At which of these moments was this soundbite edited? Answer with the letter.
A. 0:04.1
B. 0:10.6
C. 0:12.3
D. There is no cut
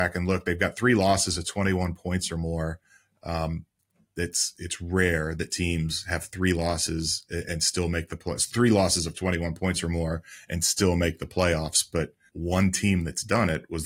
C